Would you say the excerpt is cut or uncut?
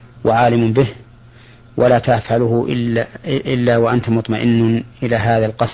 uncut